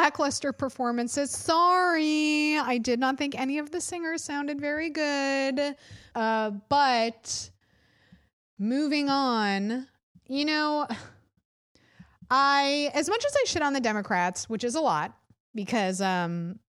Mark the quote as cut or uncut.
cut